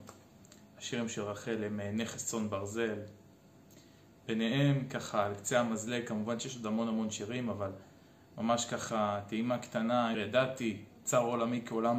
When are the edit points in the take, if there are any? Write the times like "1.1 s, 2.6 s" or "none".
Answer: 10.1 s